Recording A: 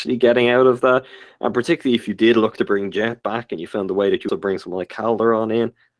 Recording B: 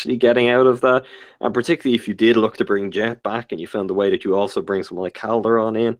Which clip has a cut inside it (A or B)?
A